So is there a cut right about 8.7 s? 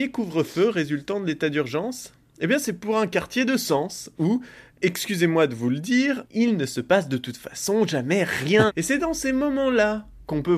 yes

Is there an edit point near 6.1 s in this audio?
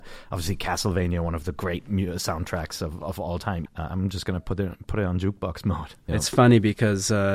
yes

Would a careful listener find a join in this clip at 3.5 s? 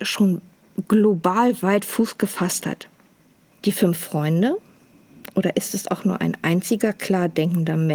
yes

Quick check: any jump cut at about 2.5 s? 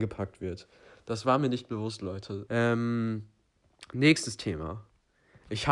yes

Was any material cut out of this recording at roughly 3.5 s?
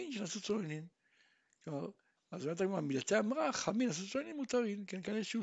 no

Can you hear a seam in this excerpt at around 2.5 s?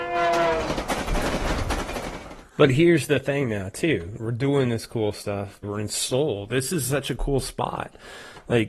no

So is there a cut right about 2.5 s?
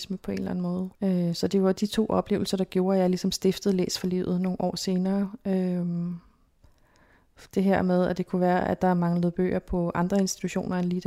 no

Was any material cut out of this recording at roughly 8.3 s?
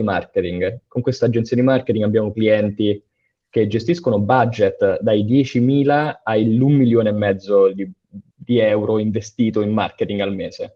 yes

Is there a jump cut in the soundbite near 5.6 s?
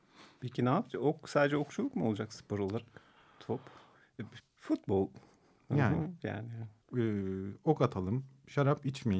no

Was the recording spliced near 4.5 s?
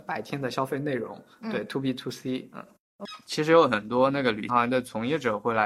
yes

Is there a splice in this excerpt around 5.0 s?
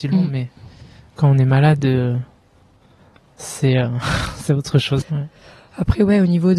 yes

